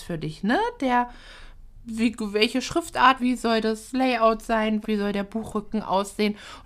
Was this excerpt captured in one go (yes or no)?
no